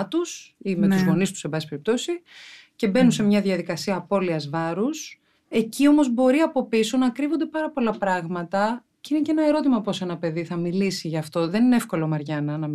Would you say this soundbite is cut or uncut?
uncut